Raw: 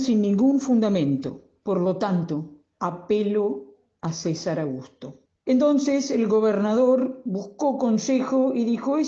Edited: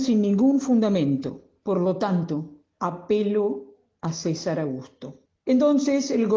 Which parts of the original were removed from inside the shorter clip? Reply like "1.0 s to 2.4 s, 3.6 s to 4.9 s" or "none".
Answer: none